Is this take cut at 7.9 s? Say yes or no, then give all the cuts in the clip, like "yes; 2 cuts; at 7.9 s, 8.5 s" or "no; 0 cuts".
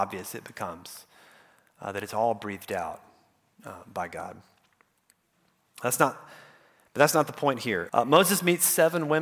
yes; 1 cut; at 7.9 s